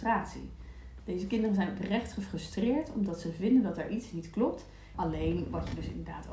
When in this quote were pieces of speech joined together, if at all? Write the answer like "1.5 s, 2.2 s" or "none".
1.0 s, 4.9 s